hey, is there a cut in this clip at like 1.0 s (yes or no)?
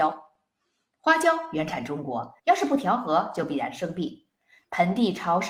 no